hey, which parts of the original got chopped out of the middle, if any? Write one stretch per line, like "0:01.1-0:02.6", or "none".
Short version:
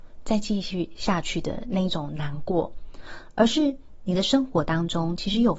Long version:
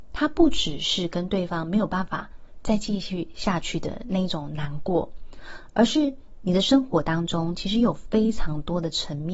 none